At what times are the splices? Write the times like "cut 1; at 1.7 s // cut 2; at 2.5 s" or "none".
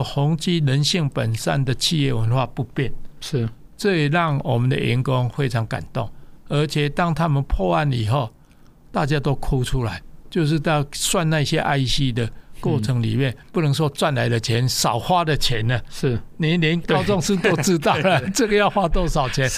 cut 1; at 13.5 s